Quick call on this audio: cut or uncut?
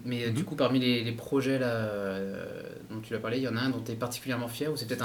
uncut